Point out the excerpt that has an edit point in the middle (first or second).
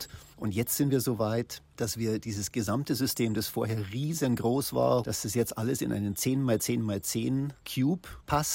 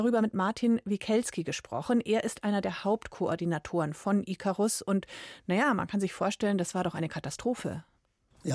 first